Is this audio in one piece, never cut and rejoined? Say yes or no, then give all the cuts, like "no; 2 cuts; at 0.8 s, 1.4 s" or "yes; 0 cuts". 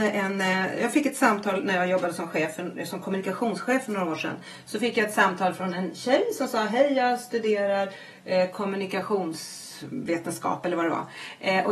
yes; 0 cuts